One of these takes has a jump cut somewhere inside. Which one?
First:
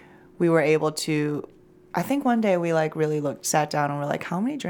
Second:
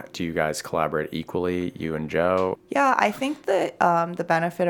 second; 1 cut; at 2.6 s

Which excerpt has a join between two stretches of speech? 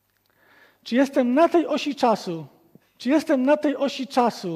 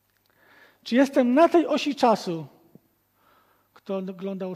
first; 1 cut; at 2.8 s

